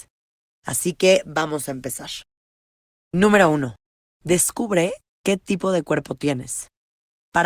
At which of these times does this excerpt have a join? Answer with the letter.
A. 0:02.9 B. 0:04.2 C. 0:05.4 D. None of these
D